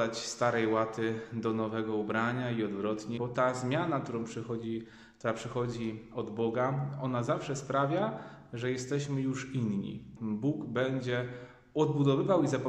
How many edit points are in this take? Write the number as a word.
two